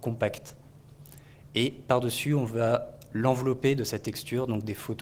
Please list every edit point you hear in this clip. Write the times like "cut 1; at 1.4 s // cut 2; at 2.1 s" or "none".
none